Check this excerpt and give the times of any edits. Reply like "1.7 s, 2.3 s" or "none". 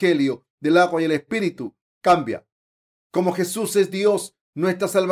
none